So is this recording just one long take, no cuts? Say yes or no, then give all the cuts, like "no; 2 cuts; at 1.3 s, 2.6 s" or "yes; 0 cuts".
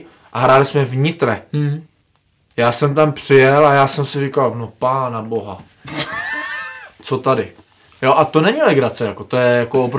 yes; 0 cuts